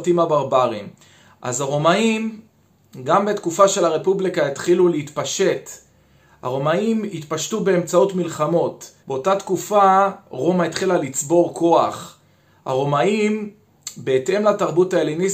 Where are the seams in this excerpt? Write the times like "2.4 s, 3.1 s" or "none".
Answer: 9.0 s